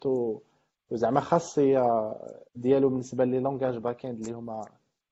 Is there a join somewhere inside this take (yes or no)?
yes